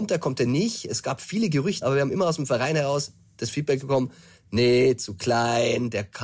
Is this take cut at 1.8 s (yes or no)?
yes